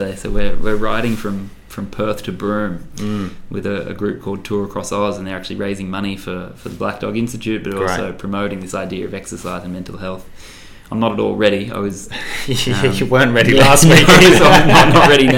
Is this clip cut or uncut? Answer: uncut